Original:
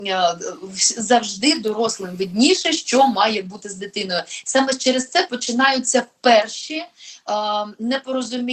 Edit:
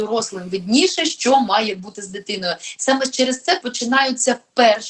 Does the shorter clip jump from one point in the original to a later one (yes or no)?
no